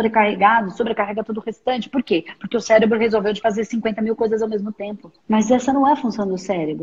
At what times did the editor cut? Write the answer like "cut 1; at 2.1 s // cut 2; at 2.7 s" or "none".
cut 1; at 5.2 s